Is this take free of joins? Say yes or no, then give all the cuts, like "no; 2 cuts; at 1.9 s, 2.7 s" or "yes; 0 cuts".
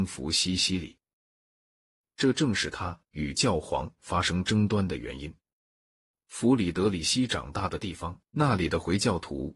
no; 1 cut; at 8.3 s